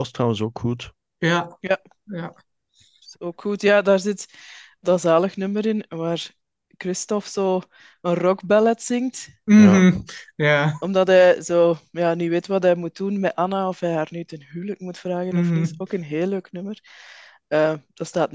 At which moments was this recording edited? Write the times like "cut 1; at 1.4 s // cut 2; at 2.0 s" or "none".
cut 1; at 4.8 s